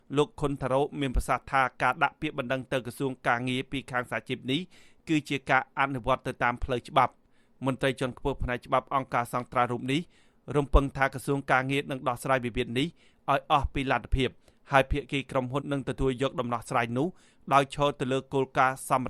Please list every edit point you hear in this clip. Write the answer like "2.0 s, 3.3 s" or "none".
15.6 s